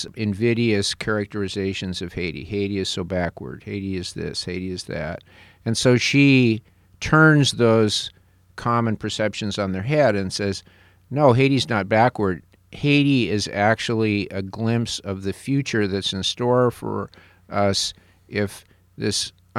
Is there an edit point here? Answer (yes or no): no